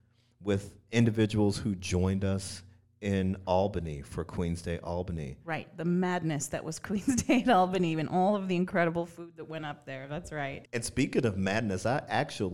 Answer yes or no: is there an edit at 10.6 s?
yes